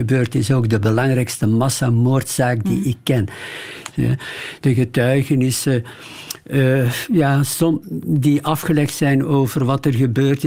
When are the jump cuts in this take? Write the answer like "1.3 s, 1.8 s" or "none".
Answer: 3.9 s